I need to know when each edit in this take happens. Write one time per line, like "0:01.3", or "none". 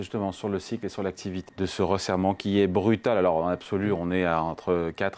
0:01.5